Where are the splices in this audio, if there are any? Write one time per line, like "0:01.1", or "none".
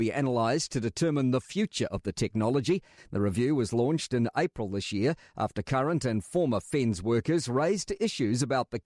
0:03.0